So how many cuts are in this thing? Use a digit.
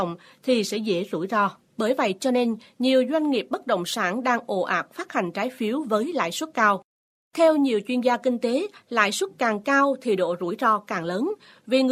1